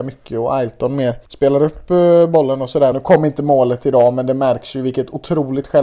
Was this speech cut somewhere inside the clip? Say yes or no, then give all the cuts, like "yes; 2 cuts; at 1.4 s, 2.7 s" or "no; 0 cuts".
yes; 2 cuts; at 1.3 s, 2.9 s